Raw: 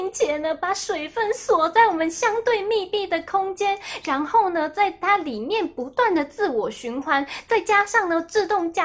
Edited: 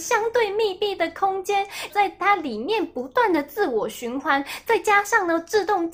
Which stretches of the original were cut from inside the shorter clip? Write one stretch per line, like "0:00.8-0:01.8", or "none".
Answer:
0:04.0-0:04.7